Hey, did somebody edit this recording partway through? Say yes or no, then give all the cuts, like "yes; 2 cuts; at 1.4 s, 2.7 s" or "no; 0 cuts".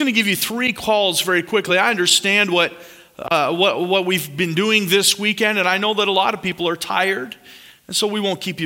no; 0 cuts